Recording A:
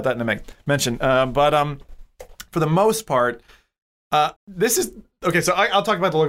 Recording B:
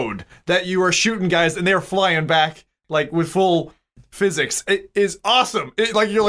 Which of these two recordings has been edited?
A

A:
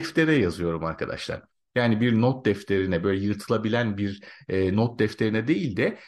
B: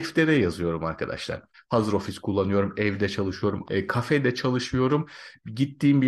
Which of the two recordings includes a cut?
B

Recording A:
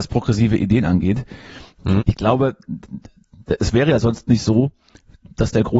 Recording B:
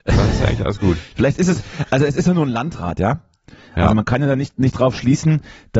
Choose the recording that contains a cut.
A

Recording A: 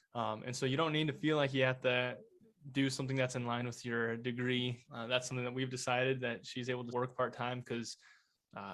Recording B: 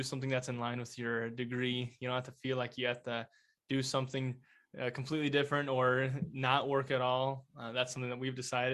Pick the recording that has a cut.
A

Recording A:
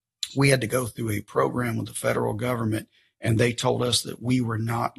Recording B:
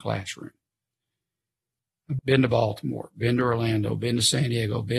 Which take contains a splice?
B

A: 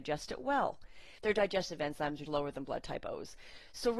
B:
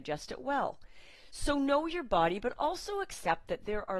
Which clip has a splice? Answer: A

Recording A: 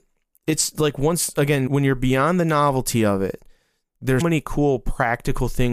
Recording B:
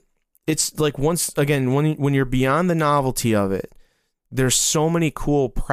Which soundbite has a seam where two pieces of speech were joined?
A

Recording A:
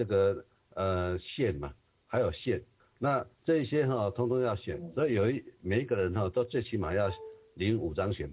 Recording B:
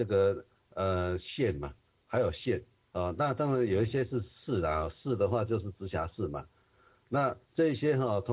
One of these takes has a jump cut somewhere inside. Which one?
A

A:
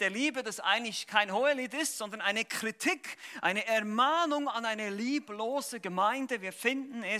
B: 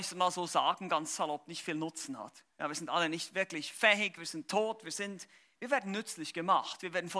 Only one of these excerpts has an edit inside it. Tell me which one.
B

